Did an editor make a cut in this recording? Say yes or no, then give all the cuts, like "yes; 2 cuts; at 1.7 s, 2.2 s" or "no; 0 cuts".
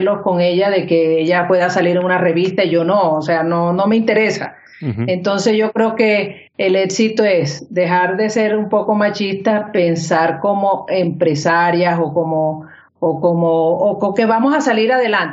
no; 0 cuts